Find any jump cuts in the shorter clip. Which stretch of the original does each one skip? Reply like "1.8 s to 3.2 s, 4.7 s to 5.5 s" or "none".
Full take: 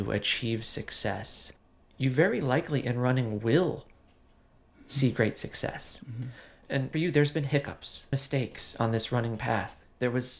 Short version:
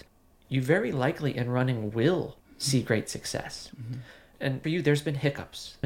3.9 s to 4.7 s